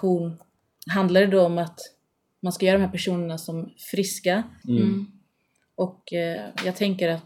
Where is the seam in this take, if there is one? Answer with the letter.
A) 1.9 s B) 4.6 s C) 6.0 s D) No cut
B